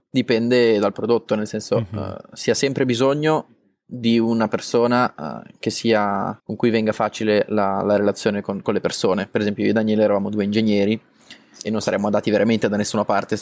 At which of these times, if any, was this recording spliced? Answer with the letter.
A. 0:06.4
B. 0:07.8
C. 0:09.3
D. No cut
A